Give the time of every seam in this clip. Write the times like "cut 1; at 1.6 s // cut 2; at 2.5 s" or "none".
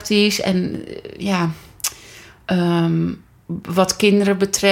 none